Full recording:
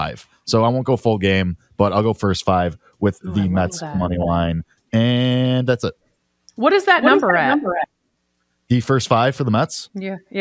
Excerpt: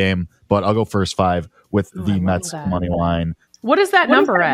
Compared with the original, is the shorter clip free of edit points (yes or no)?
no